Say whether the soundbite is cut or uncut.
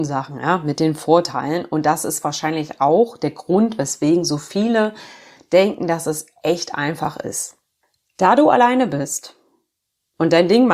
uncut